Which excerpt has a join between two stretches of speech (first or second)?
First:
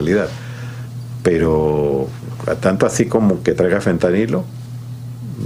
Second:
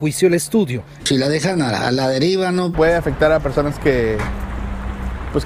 second